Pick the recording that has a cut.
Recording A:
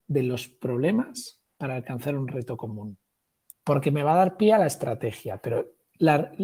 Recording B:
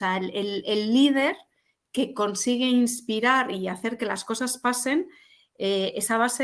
A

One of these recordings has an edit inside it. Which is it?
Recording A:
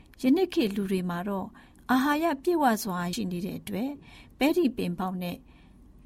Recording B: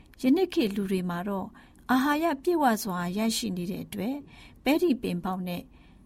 A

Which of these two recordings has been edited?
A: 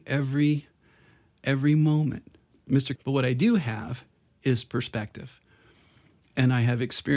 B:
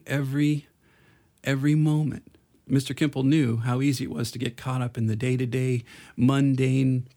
A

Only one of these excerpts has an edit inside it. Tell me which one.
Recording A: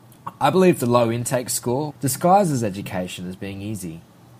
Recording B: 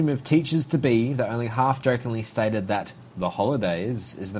A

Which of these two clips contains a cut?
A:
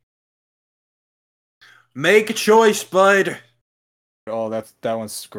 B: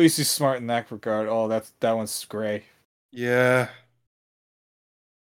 A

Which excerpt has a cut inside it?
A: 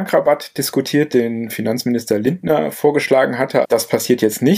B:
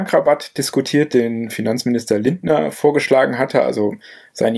A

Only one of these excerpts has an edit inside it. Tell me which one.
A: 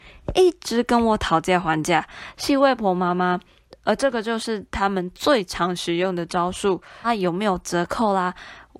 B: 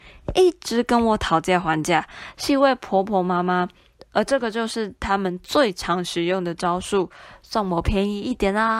A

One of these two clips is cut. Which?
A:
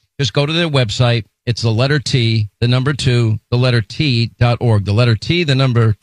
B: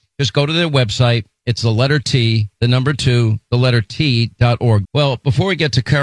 B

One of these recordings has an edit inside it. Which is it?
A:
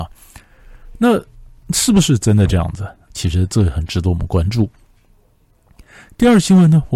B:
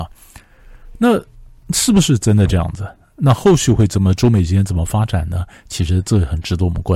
A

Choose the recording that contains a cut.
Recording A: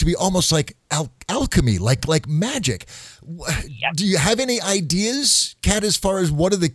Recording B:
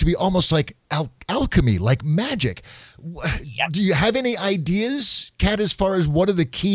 B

